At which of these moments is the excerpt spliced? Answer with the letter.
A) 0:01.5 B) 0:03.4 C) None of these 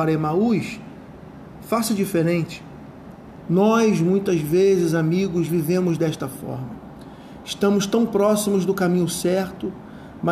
B